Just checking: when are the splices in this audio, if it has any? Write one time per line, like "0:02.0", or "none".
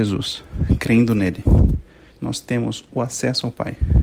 0:02.1

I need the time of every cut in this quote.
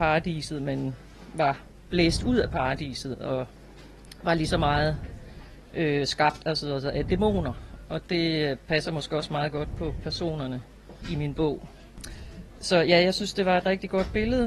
none

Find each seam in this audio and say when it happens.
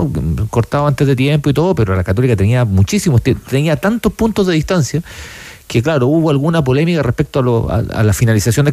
none

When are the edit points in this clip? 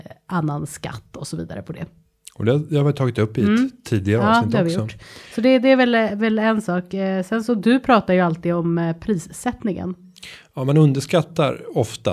none

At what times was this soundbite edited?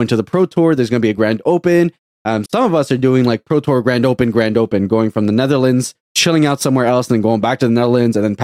0:02.5
0:06.0

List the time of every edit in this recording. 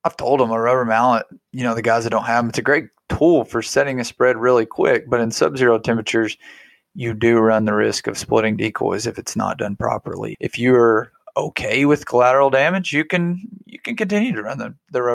0:10.3

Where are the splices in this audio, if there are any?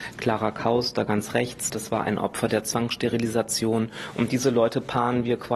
0:01.7

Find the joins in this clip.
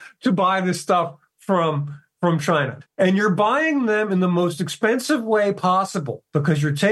0:02.9

